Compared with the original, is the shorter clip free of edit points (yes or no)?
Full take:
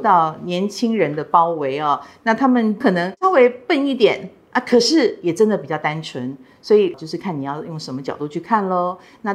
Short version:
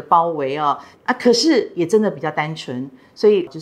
no